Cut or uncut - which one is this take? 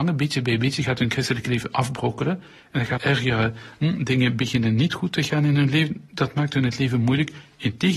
cut